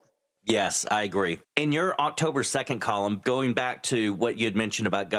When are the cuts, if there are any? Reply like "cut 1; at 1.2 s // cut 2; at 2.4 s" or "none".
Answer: cut 1; at 1.4 s

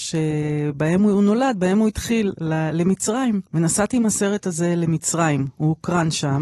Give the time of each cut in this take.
cut 1; at 3.5 s

